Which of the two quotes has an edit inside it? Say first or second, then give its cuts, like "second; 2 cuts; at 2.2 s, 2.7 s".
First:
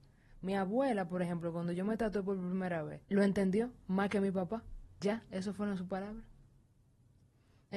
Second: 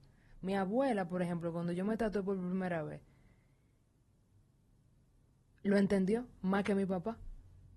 first; 2 cuts; at 3.0 s, 5.0 s